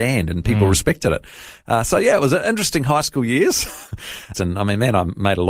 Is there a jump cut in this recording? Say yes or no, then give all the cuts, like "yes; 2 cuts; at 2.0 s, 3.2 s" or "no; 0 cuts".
yes; 1 cut; at 4.3 s